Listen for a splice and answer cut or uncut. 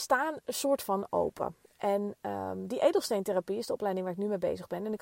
uncut